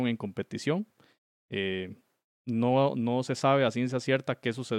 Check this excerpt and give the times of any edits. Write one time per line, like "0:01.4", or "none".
none